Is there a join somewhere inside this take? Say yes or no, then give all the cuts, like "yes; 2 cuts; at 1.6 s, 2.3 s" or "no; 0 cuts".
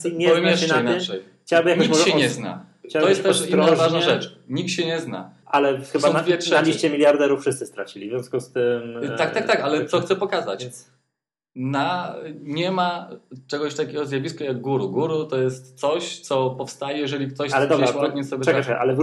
yes; 1 cut; at 5.4 s